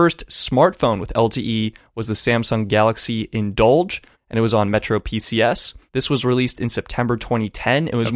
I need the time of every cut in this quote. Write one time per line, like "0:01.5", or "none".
0:04.1
0:05.9

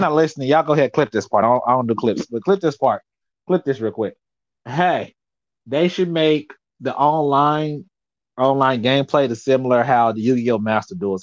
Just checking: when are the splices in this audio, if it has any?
none

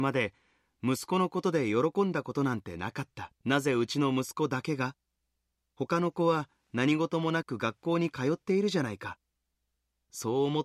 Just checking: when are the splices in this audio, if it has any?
0:03.4

